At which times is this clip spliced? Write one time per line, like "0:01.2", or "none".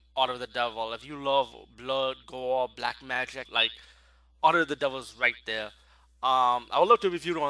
0:03.5